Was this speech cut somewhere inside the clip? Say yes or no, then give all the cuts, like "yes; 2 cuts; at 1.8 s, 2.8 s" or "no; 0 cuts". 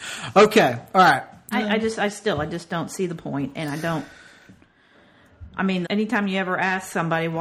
yes; 2 cuts; at 1.5 s, 5.8 s